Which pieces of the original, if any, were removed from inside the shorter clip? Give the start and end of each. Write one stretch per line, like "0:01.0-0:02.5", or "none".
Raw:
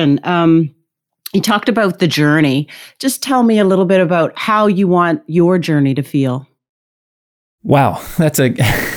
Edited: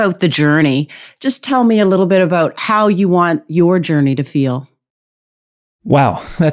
none